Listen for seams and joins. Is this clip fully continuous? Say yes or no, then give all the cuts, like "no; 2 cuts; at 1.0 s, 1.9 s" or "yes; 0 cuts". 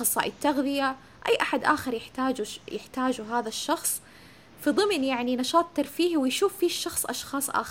yes; 0 cuts